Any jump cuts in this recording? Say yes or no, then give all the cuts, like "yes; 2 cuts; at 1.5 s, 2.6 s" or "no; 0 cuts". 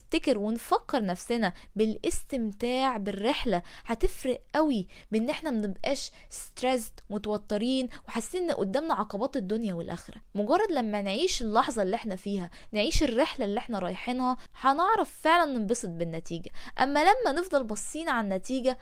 no; 0 cuts